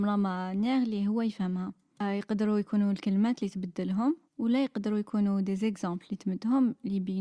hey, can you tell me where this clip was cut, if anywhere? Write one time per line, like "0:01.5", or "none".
0:04.3